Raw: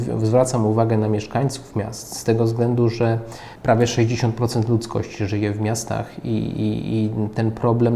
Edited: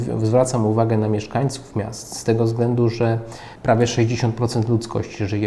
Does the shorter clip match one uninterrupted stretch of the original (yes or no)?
yes